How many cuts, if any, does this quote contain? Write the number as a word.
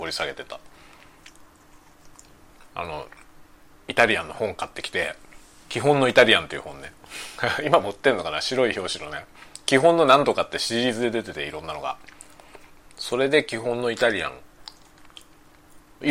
zero